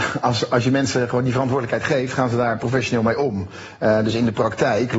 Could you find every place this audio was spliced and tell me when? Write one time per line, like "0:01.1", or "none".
none